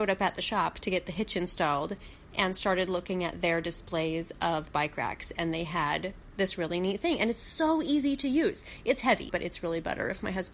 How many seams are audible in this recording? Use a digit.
1